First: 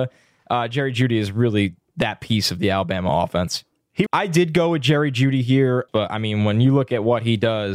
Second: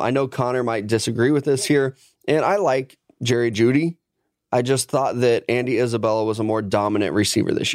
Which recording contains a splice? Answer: first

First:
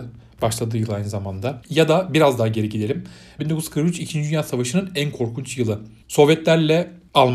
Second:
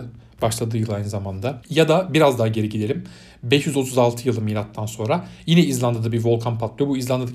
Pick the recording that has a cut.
first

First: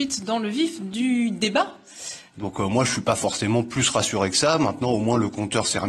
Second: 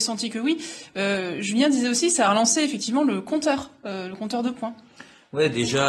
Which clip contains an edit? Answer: first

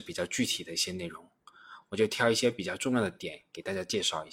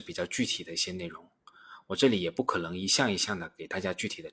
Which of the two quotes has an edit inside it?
first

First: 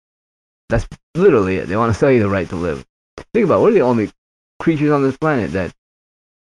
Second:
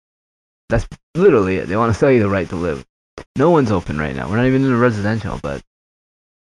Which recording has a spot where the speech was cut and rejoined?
second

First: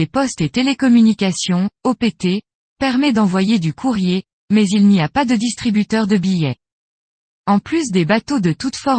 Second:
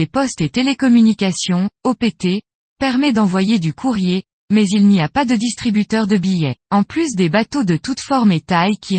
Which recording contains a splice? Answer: second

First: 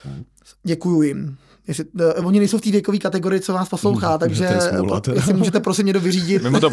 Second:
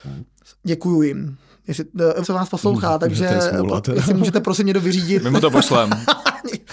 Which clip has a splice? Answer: second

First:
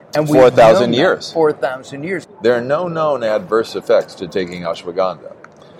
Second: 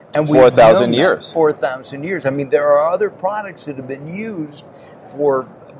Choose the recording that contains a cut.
first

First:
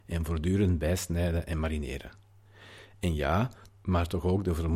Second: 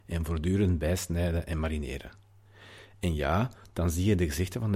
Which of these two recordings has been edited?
first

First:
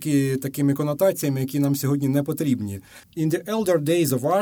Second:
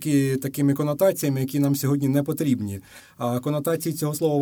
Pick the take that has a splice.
first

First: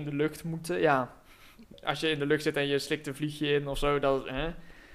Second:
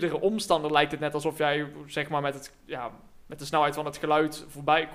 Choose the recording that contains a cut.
first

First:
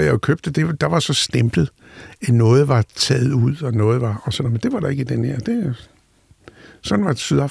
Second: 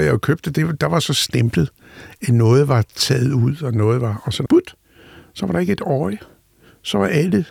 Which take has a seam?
second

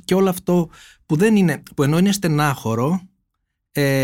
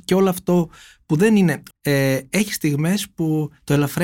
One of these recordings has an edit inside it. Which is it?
second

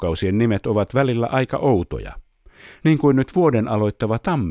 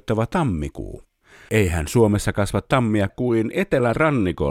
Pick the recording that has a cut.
second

